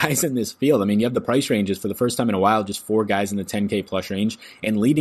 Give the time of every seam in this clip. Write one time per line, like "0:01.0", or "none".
none